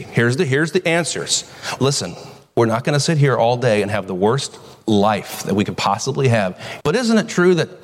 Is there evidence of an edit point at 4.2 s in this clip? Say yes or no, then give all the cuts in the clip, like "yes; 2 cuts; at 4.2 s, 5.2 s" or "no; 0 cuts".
no; 2 cuts; at 1.8 s, 6.8 s